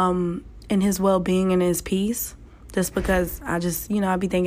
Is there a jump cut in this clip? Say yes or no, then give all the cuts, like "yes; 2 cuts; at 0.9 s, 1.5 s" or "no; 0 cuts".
no; 0 cuts